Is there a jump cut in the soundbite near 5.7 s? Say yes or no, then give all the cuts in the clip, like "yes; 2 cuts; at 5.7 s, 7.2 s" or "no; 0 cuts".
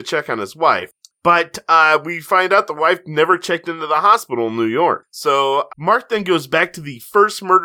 yes; 1 cut; at 5.7 s